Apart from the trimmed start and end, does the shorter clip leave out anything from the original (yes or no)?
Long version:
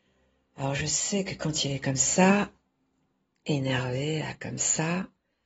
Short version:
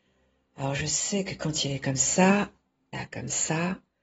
yes